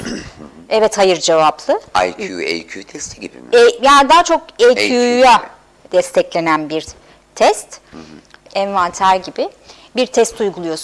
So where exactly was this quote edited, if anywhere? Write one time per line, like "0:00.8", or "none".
0:05.9
0:08.5